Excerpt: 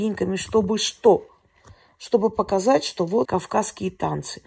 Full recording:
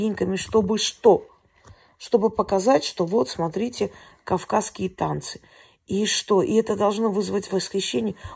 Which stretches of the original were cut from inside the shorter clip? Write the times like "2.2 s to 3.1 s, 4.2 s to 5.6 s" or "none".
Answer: 3.2 s to 4.2 s